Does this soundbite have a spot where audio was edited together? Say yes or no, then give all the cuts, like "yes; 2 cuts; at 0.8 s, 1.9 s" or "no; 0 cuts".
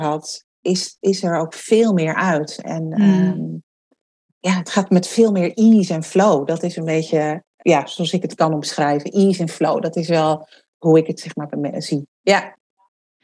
no; 0 cuts